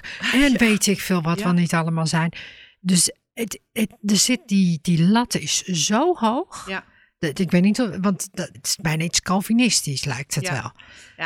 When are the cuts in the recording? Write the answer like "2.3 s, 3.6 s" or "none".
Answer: 8.5 s